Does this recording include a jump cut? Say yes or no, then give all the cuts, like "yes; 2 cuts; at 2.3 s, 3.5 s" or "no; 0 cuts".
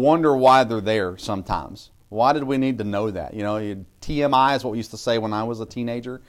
no; 0 cuts